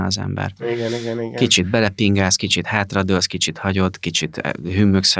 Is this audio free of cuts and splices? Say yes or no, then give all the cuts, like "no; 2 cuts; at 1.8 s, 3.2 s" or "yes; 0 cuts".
yes; 0 cuts